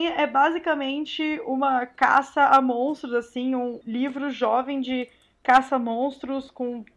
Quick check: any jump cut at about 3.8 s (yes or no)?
yes